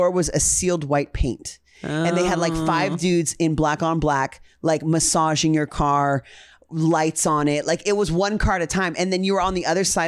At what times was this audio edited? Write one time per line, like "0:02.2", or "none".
none

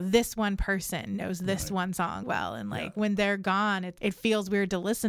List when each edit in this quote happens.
0:02.2
0:04.0

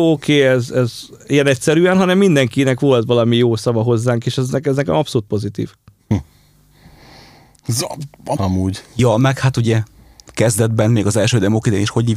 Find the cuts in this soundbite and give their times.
0:08.4

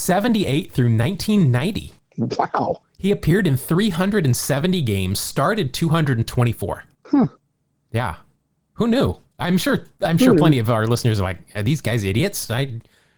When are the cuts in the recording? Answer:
none

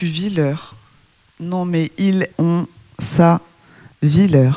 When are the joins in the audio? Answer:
0:02.3

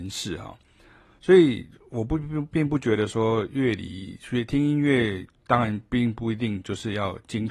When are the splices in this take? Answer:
0:01.0

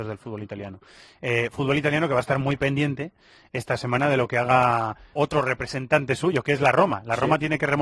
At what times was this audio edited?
0:05.1

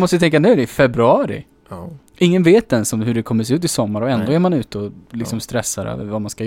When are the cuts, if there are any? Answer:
none

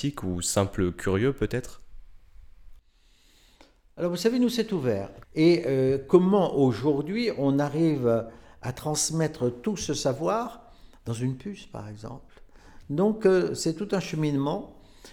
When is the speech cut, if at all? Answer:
0:05.2

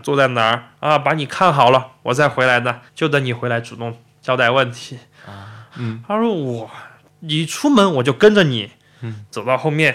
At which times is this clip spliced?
0:02.9
0:05.7

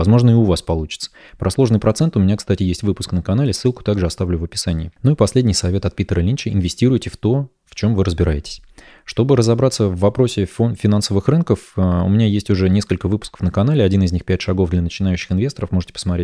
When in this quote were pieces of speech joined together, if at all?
none

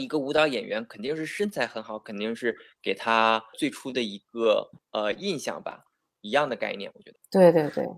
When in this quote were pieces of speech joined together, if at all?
0:06.1

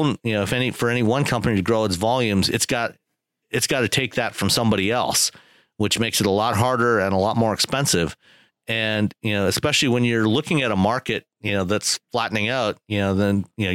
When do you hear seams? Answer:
0:08.5

